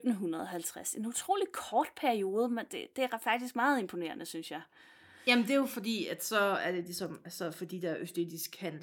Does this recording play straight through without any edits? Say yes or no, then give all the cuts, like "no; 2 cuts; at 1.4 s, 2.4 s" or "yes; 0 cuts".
yes; 0 cuts